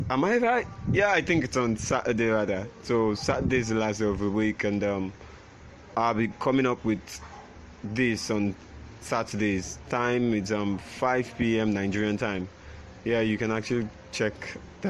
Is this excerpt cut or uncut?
uncut